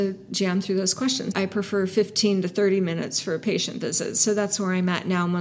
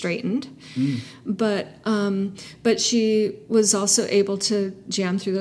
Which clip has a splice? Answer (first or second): first